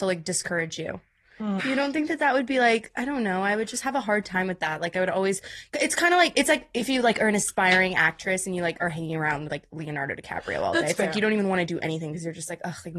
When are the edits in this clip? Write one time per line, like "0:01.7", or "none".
0:01.6